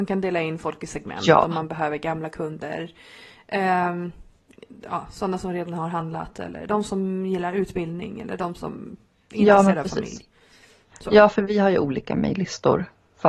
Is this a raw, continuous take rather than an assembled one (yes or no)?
yes